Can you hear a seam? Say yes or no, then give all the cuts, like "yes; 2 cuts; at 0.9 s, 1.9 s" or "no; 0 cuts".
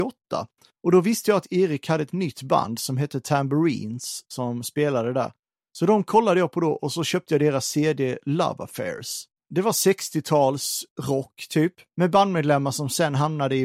yes; 1 cut; at 11.9 s